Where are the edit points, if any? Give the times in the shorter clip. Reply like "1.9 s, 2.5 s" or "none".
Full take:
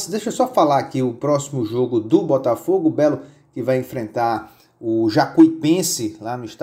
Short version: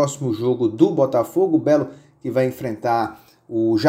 none